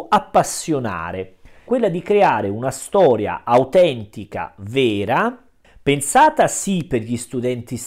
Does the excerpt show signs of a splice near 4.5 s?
no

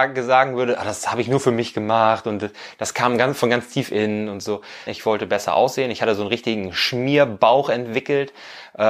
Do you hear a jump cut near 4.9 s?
yes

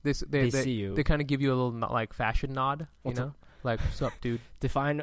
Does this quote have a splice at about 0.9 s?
no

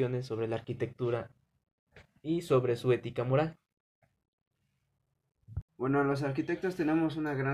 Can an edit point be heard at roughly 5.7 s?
yes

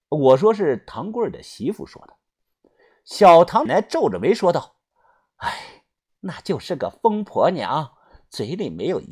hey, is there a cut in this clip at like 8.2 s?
no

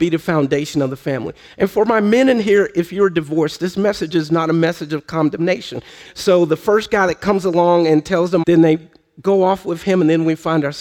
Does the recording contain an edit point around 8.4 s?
yes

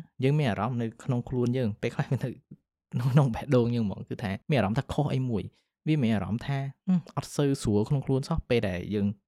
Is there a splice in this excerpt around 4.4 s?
yes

